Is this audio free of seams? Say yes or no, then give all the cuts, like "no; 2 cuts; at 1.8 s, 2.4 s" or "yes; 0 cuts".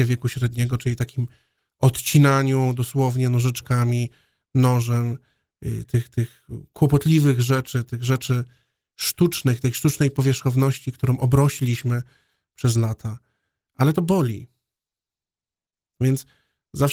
no; 1 cut; at 5.8 s